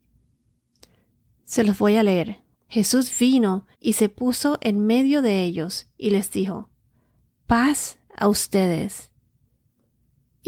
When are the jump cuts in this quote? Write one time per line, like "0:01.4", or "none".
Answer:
0:02.5
0:03.7